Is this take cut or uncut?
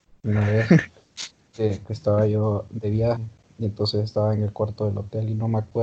cut